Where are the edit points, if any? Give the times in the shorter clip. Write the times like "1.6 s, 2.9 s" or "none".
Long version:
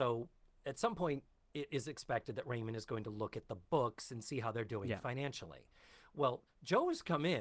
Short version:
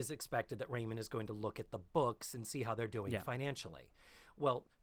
none